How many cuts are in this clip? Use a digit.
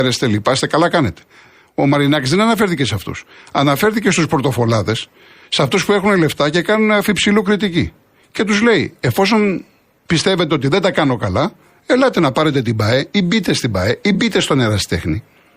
0